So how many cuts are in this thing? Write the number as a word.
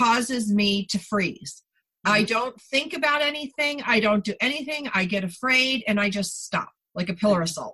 zero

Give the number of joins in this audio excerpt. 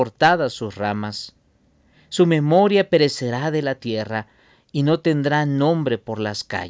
zero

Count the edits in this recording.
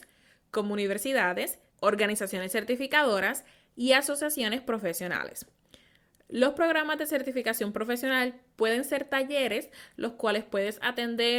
one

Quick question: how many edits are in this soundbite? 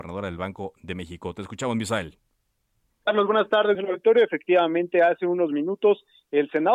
one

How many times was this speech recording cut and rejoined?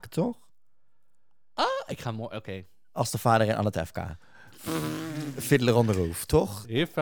zero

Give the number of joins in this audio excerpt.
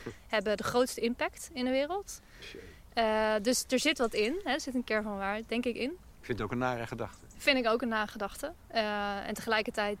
zero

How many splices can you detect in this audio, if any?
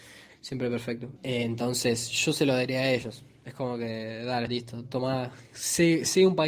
two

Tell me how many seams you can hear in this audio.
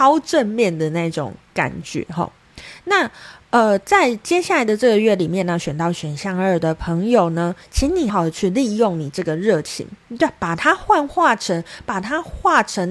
one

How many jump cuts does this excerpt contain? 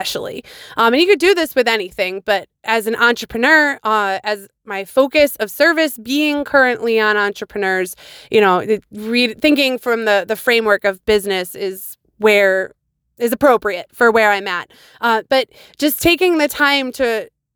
zero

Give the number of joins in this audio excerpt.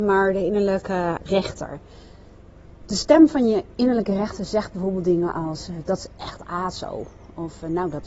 one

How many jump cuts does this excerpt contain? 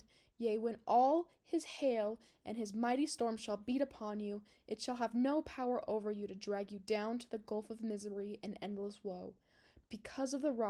zero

